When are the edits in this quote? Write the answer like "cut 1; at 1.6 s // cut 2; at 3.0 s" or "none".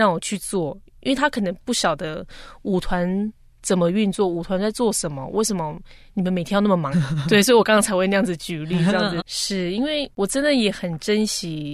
cut 1; at 6.9 s // cut 2; at 9.2 s